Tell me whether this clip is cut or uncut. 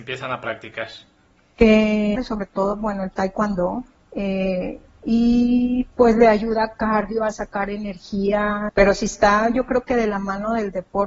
cut